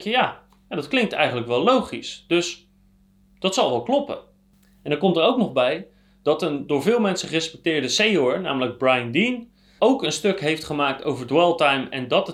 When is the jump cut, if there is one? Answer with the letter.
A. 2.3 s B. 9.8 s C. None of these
B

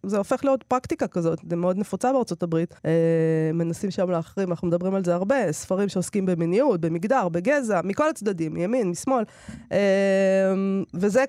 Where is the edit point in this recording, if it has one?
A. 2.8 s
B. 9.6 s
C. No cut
A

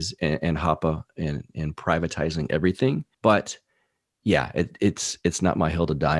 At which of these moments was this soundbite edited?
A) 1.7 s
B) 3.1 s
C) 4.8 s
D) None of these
B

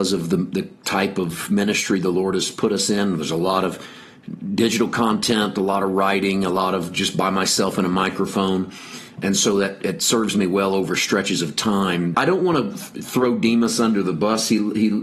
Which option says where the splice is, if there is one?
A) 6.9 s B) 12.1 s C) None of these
B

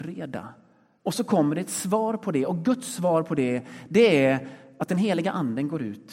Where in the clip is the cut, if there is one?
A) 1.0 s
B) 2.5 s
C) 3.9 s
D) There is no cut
A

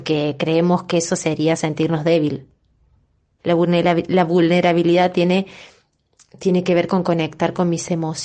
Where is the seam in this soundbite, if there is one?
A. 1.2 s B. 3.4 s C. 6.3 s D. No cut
B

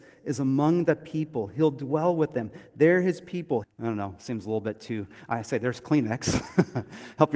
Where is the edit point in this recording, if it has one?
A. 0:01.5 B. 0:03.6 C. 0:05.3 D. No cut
B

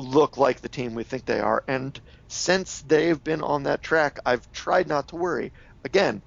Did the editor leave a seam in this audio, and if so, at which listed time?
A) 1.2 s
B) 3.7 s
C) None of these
C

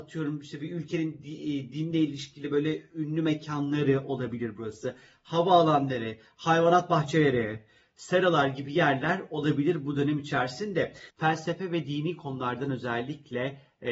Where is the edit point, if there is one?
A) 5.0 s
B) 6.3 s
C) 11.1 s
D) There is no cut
C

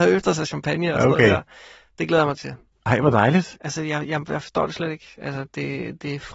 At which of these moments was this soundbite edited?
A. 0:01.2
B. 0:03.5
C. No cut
B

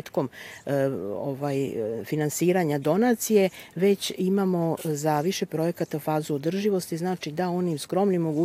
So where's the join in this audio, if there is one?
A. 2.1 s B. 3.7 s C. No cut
C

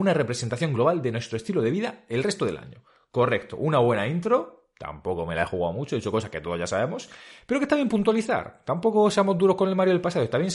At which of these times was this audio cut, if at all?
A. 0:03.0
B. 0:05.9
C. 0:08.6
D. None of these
D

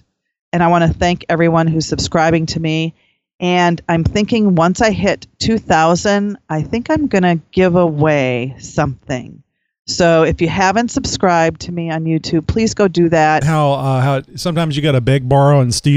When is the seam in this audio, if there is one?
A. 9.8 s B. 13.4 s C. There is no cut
B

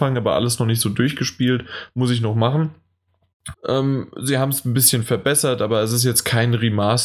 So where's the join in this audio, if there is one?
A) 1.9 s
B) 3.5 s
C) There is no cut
B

